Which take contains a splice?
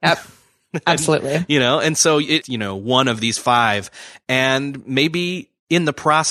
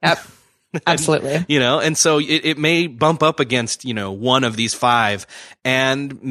first; 1 cut; at 2.4 s

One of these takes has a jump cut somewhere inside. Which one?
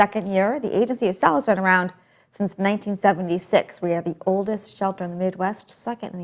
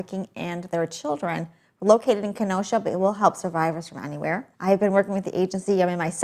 second; 1 cut; at 4.5 s

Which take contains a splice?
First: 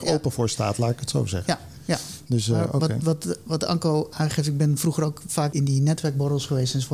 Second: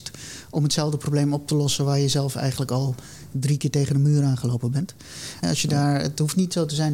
second; 1 cut; at 5.4 s

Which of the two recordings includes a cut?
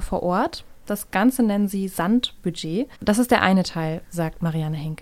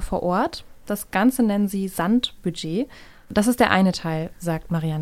first; 1 cut; at 2.9 s

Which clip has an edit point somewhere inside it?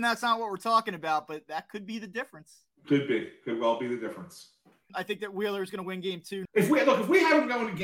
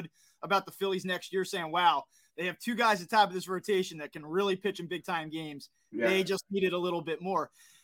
first; 2 cuts; at 4.9 s, 6.5 s

